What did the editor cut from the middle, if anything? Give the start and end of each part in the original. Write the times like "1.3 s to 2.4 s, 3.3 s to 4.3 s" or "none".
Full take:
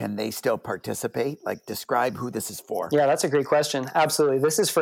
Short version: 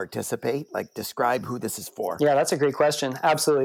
none